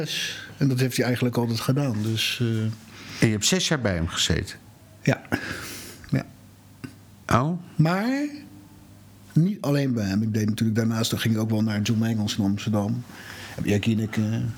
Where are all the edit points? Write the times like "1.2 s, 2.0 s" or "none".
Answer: none